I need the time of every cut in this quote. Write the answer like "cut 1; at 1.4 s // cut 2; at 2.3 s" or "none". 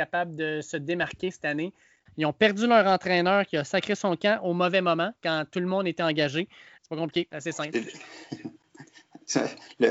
cut 1; at 2.1 s // cut 2; at 6.8 s